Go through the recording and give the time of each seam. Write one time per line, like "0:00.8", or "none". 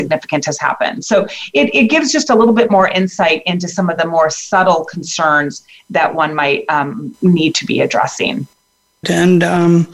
0:09.0